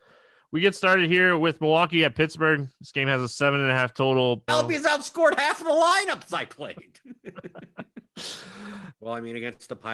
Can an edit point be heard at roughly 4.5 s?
yes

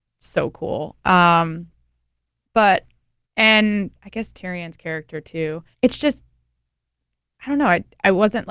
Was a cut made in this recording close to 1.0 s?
no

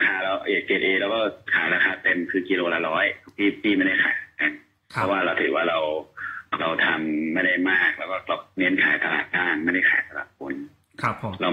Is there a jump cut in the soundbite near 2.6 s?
no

